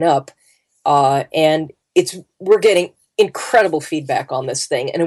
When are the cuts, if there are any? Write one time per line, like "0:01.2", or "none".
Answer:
0:01.8